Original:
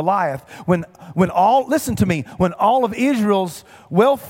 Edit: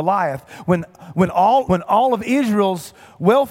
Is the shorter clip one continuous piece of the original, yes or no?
no